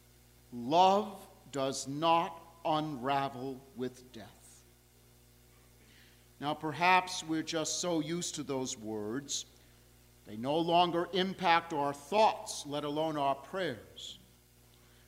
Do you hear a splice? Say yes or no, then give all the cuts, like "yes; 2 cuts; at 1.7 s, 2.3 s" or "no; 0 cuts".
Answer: no; 0 cuts